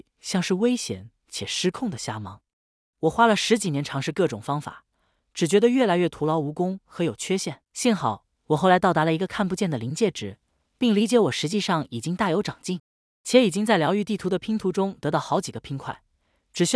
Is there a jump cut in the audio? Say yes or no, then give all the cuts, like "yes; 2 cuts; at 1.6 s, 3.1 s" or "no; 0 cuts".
yes; 1 cut; at 7.6 s